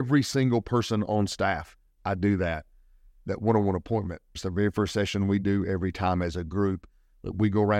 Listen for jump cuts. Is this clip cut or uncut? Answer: cut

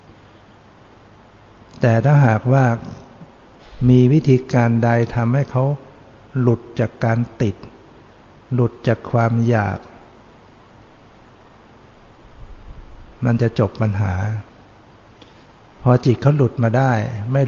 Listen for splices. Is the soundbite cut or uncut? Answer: uncut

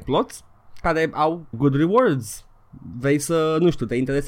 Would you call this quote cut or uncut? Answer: cut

